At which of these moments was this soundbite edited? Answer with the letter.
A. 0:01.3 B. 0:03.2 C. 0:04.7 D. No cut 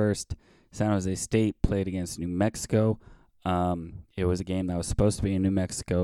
D